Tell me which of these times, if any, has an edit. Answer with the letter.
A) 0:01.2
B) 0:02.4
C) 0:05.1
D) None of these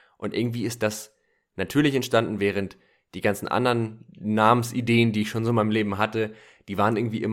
D